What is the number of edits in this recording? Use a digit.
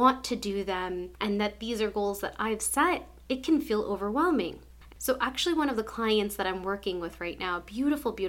1